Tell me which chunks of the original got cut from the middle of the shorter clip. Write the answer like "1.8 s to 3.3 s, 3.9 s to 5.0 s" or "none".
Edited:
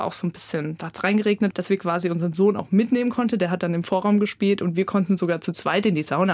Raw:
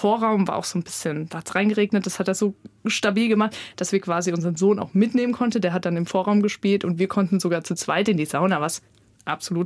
2.0 s to 3.7 s